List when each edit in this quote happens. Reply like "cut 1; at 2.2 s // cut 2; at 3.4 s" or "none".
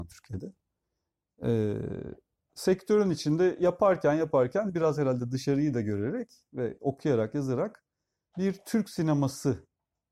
none